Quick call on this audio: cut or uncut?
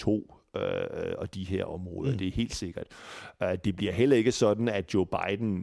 uncut